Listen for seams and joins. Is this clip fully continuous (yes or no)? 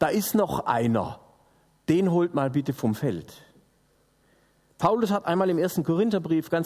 yes